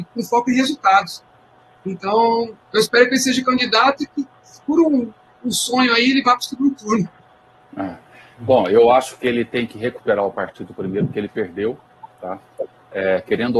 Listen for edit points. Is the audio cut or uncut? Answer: uncut